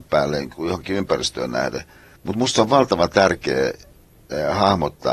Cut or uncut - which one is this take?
cut